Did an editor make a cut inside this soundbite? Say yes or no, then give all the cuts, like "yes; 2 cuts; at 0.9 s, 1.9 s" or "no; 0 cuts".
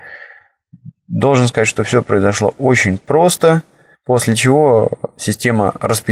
yes; 1 cut; at 3.9 s